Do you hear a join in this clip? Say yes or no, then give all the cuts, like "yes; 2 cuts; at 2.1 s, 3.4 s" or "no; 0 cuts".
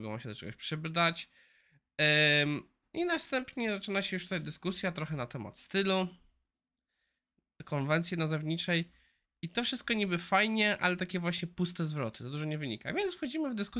no; 0 cuts